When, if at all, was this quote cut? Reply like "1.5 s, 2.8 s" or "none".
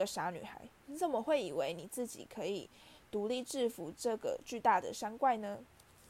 none